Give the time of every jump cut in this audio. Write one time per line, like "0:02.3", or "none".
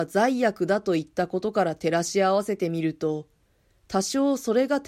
none